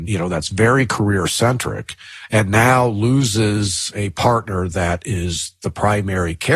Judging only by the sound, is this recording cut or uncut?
uncut